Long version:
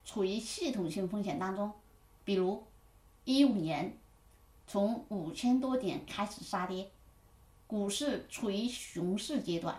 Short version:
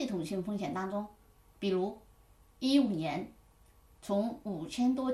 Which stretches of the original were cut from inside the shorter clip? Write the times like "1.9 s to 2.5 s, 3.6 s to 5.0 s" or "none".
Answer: none

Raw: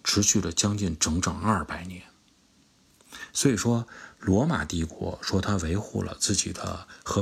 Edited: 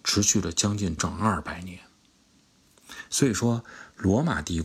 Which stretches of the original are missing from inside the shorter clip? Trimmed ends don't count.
1.0 s to 1.2 s

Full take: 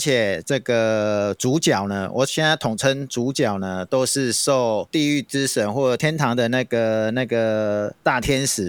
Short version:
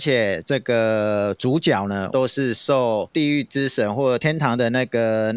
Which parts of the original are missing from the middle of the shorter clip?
2.1 s to 3.9 s

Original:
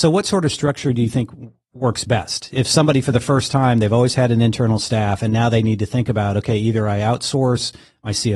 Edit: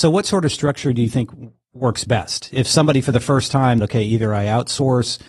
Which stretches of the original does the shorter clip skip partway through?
3.8 s to 6.3 s

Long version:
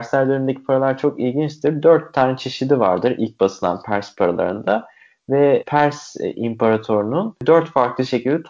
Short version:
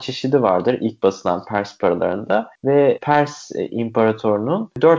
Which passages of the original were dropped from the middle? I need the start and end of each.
4.9 s to 5.2 s

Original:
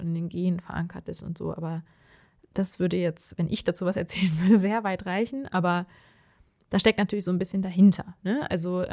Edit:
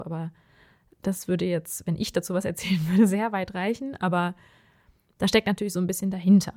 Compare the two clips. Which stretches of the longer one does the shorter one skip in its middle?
none

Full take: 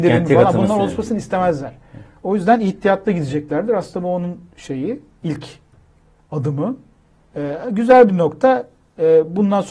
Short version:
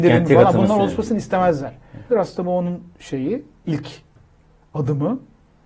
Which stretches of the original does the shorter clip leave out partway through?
2.1 s to 3.7 s

